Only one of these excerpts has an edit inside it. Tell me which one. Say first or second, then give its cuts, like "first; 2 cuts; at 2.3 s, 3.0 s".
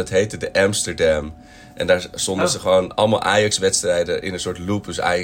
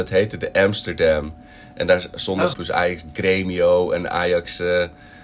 second; 1 cut; at 2.5 s